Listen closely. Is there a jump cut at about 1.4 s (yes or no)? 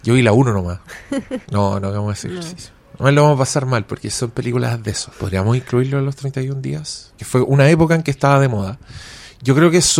yes